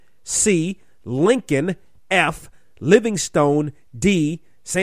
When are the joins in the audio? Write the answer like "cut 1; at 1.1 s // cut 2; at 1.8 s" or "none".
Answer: none